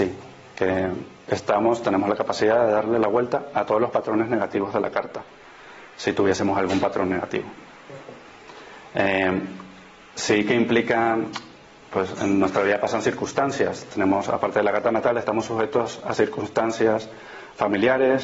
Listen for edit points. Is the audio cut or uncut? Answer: uncut